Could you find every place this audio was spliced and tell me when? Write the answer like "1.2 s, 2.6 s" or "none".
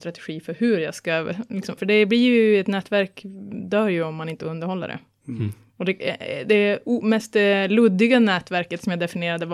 1.8 s